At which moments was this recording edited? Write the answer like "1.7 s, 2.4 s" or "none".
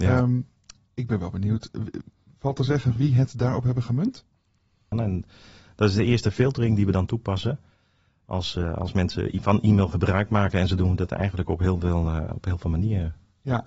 4.9 s